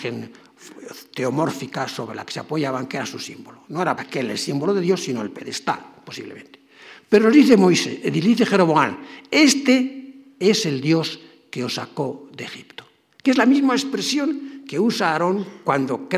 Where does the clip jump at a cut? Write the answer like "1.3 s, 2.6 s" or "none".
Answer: 4.0 s